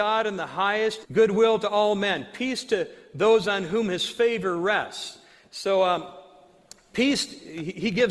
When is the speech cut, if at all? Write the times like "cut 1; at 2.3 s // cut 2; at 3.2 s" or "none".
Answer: cut 1; at 1.0 s

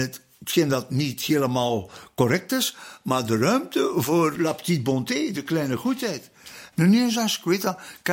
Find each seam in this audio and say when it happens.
cut 1; at 4.4 s // cut 2; at 6.7 s

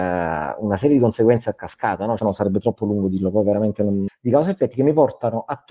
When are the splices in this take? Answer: cut 1; at 2.2 s // cut 2; at 4.1 s

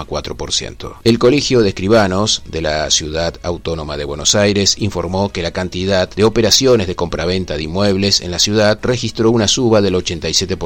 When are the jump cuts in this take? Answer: cut 1; at 1.0 s

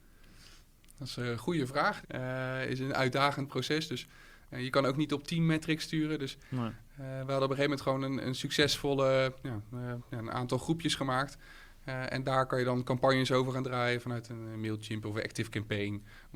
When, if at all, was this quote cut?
cut 1; at 2.0 s

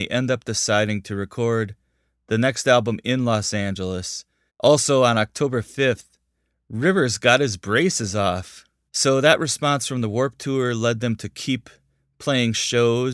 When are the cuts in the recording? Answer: cut 1; at 4.5 s // cut 2; at 8.9 s

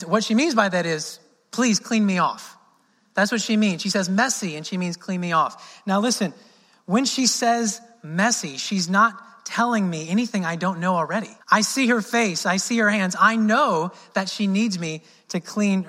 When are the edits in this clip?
cut 1; at 11.4 s

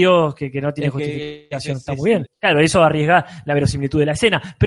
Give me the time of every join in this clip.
cut 1; at 2.2 s

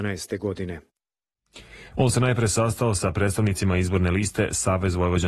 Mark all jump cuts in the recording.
cut 1; at 1.9 s

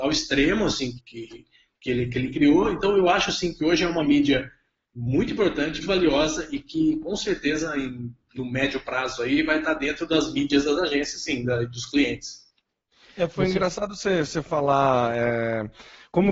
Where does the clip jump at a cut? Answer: cut 1; at 1.0 s // cut 2; at 5.8 s

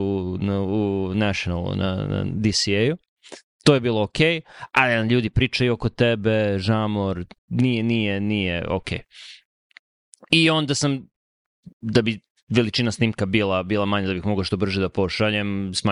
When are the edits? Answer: cut 1; at 7.4 s

